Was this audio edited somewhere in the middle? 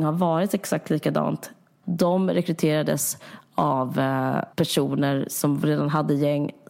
yes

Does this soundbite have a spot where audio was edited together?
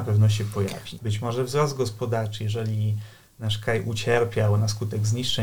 yes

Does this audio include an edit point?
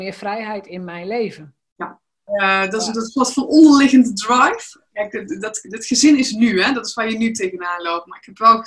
yes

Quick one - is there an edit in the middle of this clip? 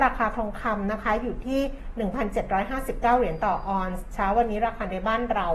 no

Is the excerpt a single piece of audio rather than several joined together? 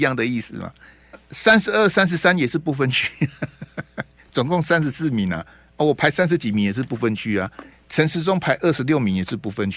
no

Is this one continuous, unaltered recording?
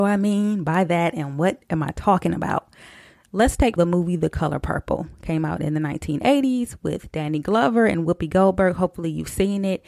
no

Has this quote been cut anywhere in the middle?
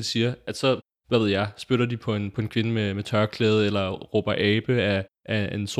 no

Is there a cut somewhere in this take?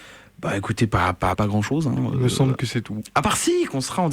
yes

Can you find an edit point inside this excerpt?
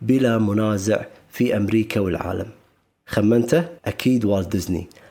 yes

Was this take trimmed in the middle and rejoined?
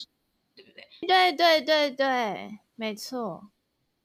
yes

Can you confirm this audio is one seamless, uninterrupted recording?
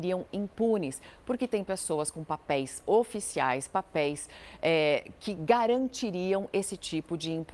yes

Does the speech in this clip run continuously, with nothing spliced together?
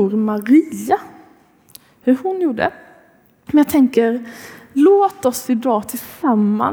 no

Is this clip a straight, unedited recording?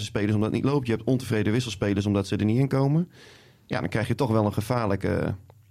yes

